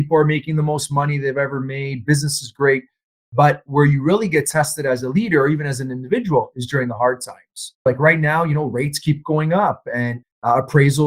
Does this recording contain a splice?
yes; 1 cut; at 7.9 s

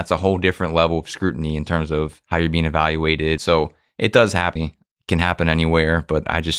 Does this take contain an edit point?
yes; 2 cuts; at 3.4 s, 4.6 s

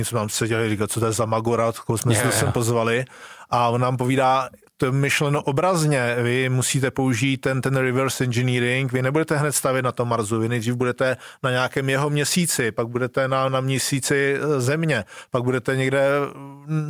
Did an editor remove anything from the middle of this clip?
no; 0 cuts

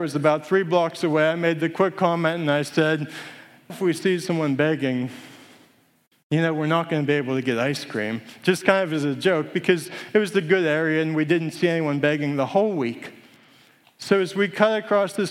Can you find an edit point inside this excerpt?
yes; 1 cut; at 3.7 s

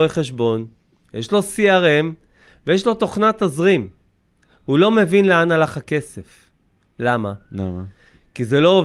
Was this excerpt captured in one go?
no; 1 cut; at 1.1 s

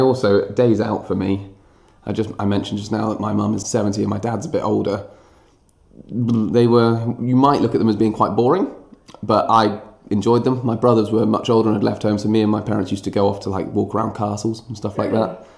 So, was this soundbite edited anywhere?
yes; 1 cut; at 3.6 s

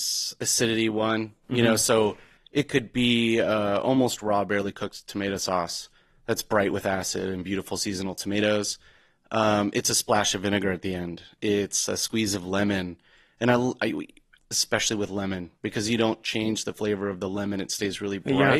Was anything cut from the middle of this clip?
yes; 1 cut; at 14.4 s

